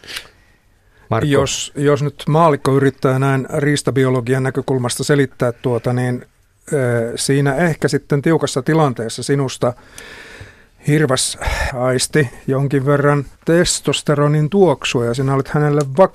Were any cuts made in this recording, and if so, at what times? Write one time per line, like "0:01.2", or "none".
0:11.7
0:13.3